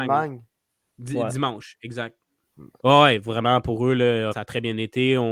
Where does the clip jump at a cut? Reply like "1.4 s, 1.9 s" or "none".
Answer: 2.8 s, 4.3 s